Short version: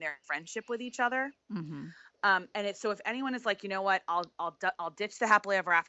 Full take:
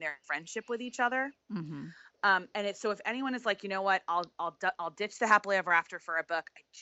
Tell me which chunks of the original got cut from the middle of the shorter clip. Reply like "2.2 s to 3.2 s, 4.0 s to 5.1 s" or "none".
none